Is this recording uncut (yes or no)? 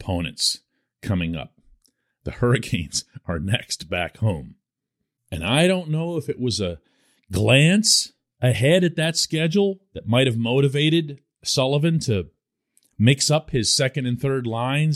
no